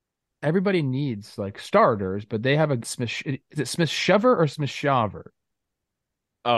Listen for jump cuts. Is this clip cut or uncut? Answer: cut